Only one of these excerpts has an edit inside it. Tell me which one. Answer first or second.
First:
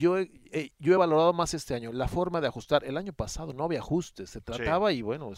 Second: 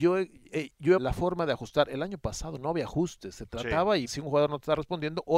second